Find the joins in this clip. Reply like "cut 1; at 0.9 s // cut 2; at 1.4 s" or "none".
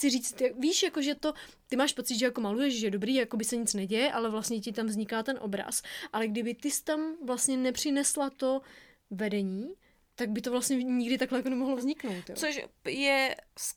none